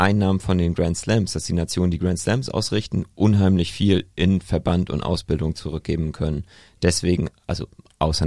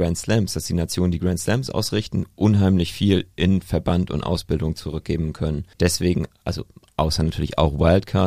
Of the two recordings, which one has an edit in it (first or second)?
second